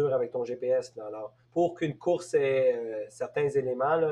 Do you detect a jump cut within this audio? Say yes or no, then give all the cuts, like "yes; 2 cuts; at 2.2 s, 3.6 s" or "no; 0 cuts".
yes; 1 cut; at 1.4 s